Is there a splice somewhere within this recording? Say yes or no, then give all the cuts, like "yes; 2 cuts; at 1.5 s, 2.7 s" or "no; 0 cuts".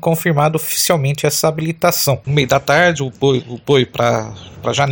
yes; 1 cut; at 2.2 s